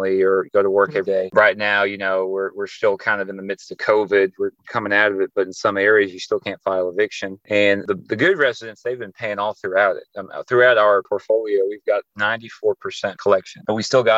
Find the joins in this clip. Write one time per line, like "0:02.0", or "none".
0:01.3